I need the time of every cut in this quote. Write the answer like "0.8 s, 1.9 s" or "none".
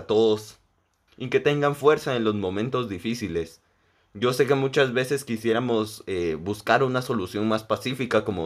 1.1 s